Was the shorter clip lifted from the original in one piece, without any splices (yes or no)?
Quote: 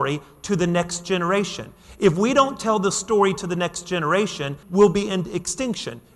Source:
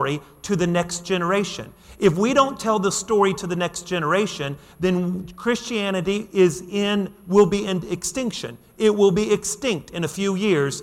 no